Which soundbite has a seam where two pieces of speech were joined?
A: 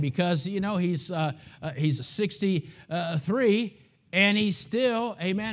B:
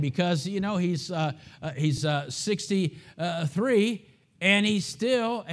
A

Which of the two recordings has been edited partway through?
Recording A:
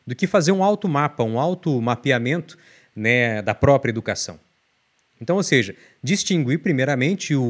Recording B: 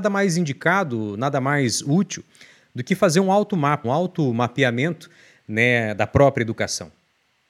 B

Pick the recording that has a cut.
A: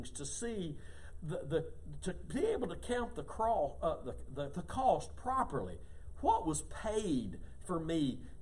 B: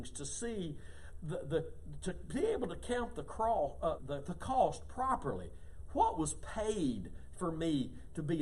B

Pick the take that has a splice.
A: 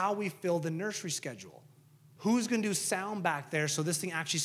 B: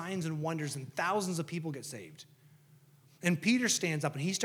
A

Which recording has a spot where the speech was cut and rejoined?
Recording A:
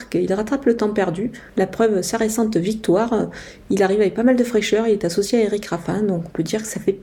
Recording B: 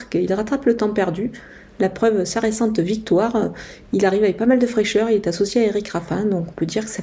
A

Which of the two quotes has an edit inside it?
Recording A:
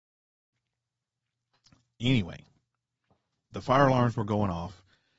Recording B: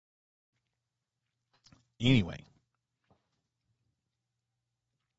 A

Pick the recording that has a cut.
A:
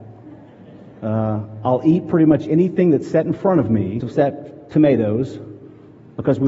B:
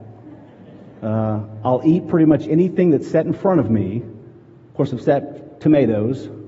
A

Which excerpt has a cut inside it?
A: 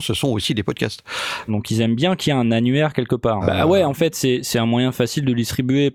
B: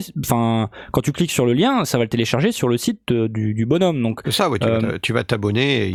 A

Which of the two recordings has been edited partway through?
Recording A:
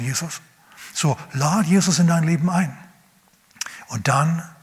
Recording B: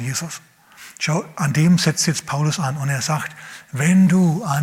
B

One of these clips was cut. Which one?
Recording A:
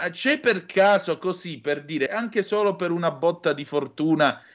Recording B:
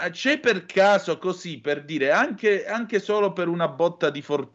A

